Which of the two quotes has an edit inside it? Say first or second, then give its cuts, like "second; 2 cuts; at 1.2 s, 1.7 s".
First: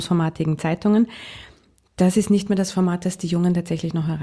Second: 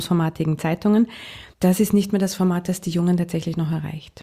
second; 1 cut; at 1.5 s